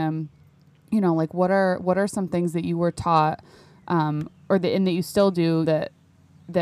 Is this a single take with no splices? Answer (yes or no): no